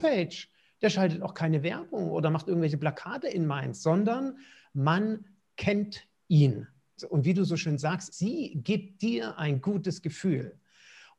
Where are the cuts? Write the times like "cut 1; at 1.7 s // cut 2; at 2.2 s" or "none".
cut 1; at 7.0 s // cut 2; at 8.1 s